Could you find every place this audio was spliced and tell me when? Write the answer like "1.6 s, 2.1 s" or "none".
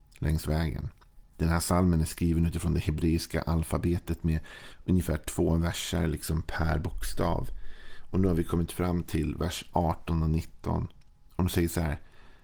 1.3 s

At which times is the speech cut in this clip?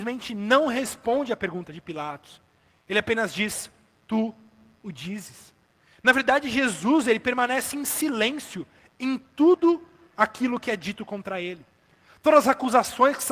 none

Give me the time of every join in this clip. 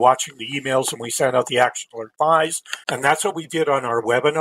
2.8 s

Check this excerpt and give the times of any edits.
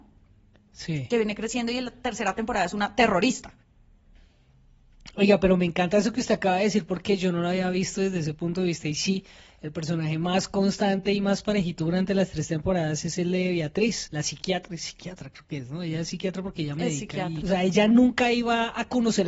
14.1 s, 17.4 s

